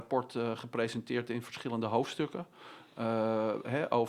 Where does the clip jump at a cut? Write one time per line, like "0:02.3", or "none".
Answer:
none